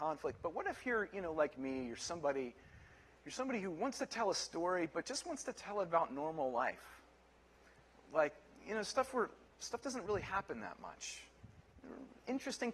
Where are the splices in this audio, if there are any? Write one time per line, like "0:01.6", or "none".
none